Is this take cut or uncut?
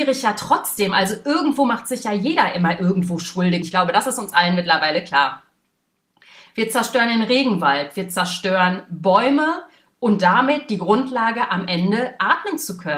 cut